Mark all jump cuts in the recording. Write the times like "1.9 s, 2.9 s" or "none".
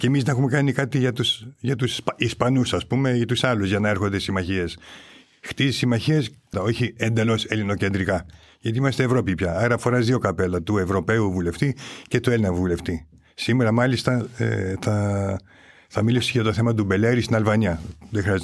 6.5 s